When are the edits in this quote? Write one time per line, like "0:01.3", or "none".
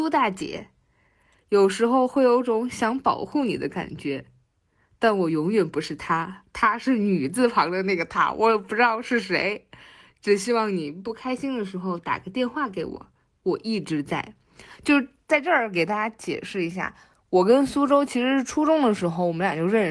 none